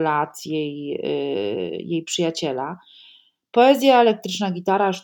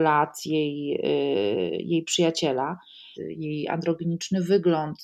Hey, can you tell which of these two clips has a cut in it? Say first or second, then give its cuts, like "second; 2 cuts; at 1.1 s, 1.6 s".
second; 1 cut; at 3.1 s